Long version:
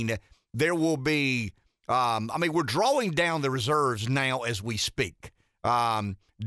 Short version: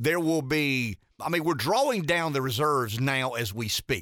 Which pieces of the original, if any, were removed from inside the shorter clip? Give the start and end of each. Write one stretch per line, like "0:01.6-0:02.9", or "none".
0:01.7-0:02.3